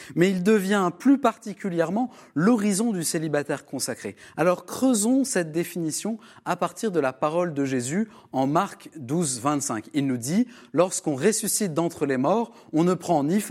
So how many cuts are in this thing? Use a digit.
0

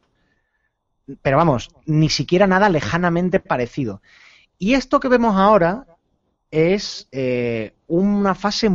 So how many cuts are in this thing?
0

